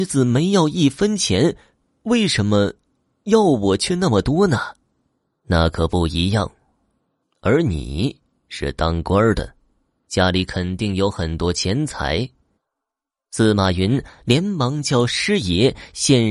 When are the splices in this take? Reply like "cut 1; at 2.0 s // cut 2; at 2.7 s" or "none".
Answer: cut 1; at 7.2 s // cut 2; at 12.5 s